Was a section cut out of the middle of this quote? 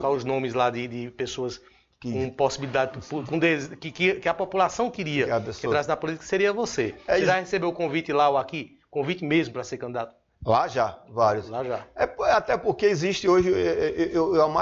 no; 0 cuts

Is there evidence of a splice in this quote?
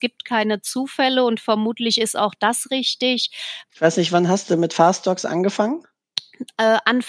yes; 1 cut; at 3.7 s

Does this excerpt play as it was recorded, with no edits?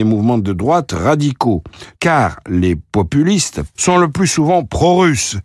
no; 2 cuts; at 2.0 s, 3.8 s

